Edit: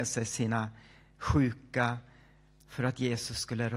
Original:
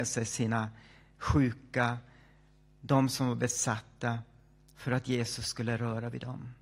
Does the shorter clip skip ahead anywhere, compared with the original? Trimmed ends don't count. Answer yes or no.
yes